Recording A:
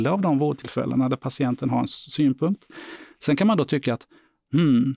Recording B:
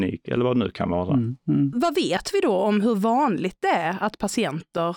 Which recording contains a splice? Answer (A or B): B